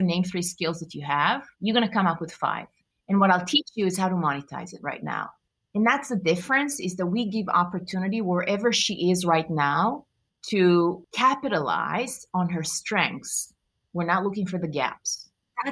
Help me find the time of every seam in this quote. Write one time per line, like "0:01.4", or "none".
0:01.5